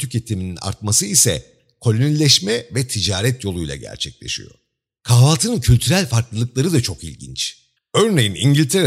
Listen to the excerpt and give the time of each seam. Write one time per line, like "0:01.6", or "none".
0:07.8